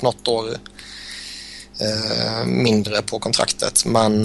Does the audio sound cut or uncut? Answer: uncut